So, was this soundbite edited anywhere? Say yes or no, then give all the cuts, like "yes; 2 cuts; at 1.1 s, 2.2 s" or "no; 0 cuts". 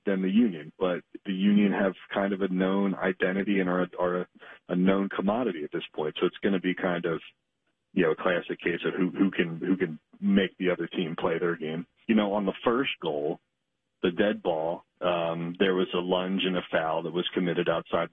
yes; 2 cuts; at 12.0 s, 15.0 s